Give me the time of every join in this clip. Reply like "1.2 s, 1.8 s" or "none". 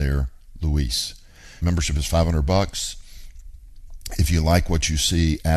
1.6 s